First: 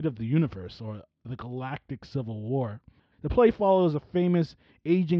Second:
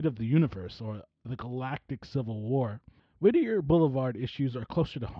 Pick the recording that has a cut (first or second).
first